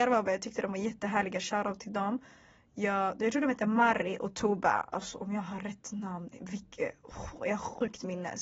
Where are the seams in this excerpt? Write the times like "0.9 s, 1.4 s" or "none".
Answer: none